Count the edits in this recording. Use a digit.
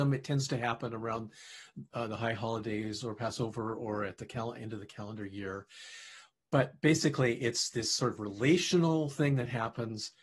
0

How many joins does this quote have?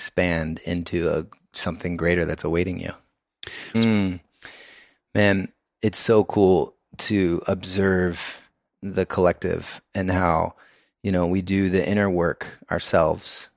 1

